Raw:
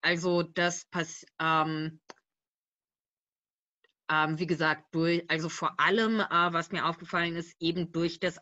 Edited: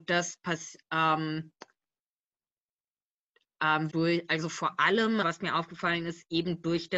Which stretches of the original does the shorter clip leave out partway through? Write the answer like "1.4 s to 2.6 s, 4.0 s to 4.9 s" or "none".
4.4 s to 4.9 s, 6.2 s to 6.5 s